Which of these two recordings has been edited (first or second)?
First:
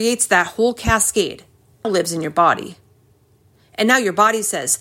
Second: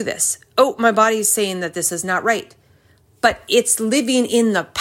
first